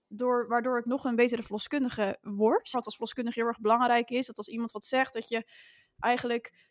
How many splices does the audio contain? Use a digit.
1